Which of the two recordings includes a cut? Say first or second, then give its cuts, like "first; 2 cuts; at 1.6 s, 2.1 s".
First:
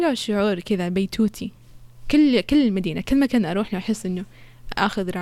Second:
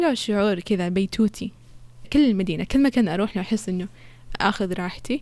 second; 1 cut; at 2.0 s